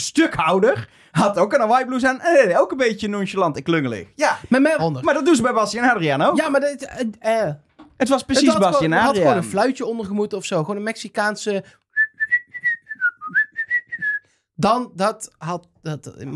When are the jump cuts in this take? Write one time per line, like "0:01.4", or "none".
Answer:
0:04.8